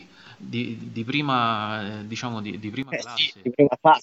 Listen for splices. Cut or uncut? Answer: uncut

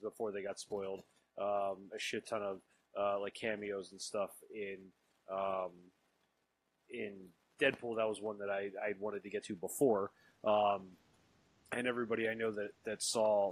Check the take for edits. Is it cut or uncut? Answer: cut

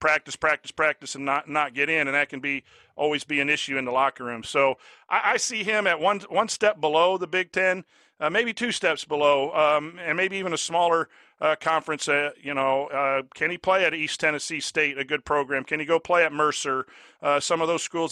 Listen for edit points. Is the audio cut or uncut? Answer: uncut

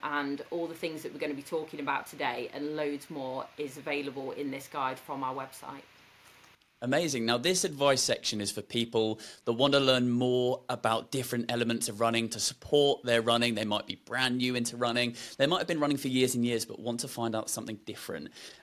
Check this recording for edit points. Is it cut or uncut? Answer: uncut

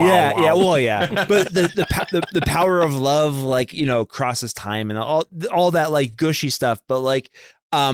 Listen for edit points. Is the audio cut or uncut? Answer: uncut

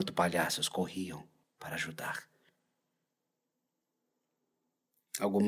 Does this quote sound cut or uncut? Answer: cut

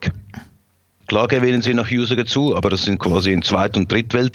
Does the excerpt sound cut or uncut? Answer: cut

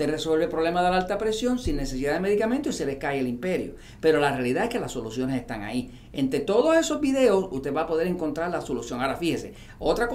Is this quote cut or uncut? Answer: uncut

